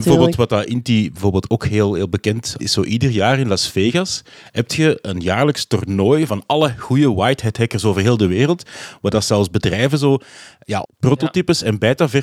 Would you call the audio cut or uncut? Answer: cut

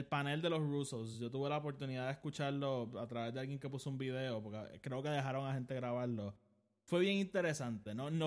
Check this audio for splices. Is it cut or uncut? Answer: uncut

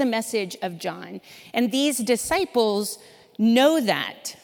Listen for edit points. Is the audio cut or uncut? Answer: uncut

